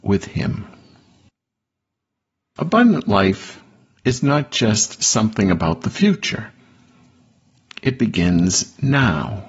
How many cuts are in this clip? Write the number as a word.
zero